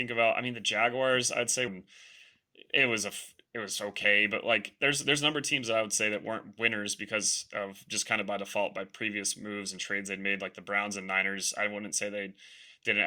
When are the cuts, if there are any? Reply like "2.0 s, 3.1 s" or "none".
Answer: 1.7 s